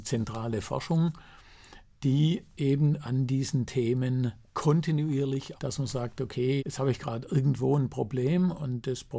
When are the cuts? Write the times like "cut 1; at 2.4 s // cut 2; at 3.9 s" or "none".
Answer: cut 1; at 4.5 s // cut 2; at 5.6 s // cut 3; at 6.6 s